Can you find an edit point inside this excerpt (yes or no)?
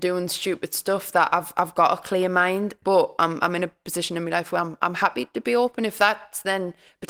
yes